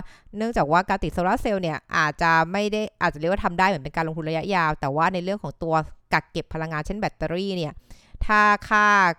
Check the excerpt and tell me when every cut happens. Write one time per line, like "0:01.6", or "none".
none